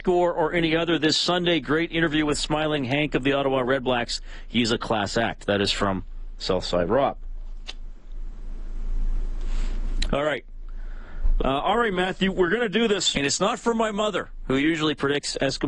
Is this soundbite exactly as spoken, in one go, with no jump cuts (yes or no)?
no